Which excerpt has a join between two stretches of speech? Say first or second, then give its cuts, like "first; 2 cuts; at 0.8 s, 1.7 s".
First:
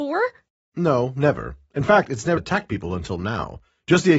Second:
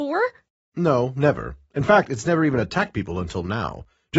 first; 1 cut; at 2.4 s